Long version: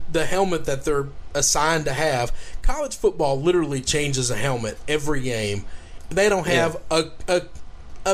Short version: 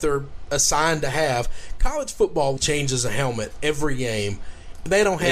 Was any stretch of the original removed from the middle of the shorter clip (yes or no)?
yes